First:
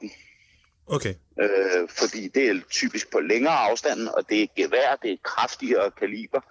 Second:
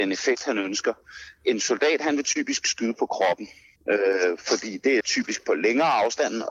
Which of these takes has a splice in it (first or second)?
second